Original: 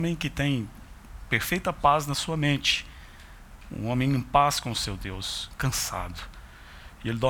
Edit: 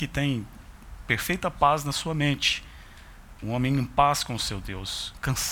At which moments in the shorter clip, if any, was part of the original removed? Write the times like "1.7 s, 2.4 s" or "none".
3.4 s